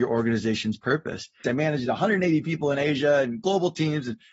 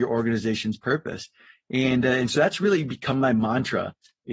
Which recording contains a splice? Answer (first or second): first